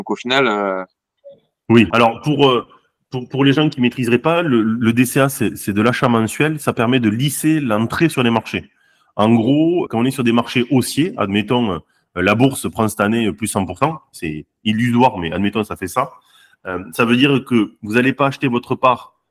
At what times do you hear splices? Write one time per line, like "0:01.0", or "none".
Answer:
0:01.9
0:09.9